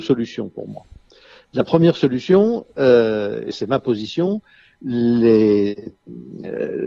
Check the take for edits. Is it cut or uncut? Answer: cut